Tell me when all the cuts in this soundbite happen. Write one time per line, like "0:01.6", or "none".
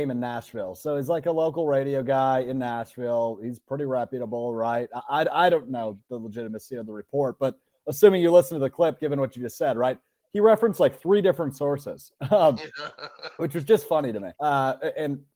0:14.3